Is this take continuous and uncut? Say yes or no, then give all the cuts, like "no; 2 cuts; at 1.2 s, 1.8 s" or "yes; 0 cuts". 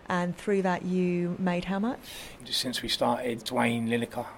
no; 2 cuts; at 2.4 s, 3.4 s